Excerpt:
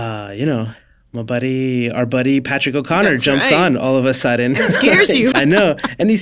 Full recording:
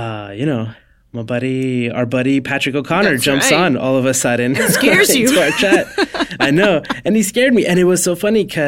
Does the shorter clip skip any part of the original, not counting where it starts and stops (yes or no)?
yes